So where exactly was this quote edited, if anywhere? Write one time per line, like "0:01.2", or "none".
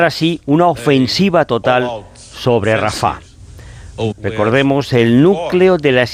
0:04.1